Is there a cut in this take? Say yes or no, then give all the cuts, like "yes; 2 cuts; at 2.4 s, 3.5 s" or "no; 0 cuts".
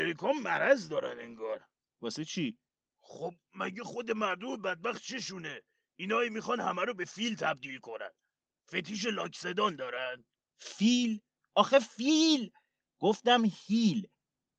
no; 0 cuts